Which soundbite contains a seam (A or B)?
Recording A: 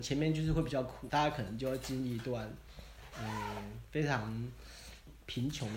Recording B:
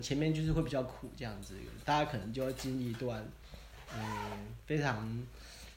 A